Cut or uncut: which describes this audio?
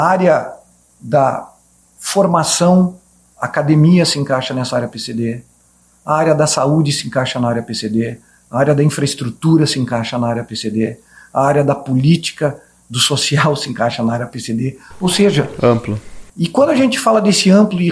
cut